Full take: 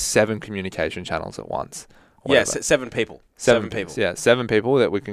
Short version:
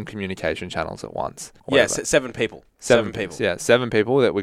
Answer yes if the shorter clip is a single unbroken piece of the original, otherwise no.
no